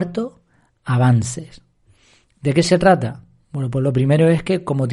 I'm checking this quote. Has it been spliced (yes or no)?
no